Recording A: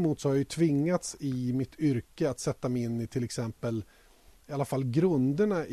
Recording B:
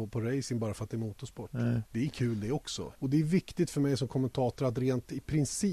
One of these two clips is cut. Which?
B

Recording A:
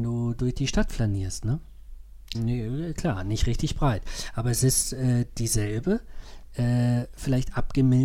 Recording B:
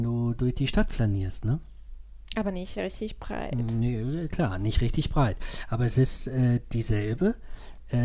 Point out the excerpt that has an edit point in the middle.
A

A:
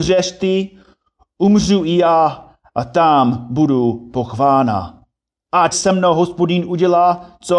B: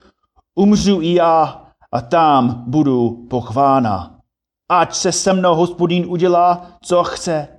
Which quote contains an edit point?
A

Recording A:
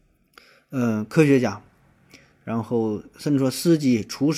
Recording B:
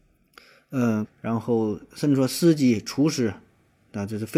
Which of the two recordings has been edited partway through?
B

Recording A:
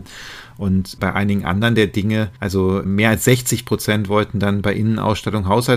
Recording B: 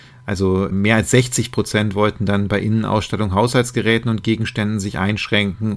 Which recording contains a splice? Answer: A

